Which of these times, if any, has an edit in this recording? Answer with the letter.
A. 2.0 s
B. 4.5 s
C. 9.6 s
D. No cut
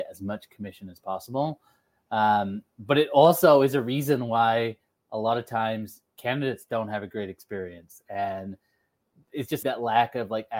C